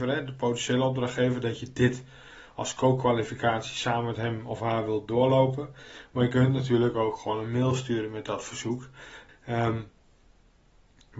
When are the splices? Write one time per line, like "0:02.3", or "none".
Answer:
0:09.3